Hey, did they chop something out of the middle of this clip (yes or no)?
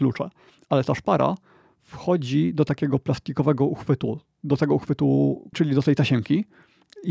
yes